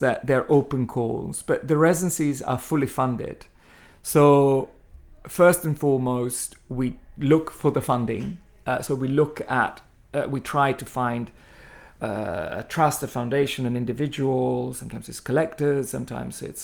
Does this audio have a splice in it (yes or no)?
no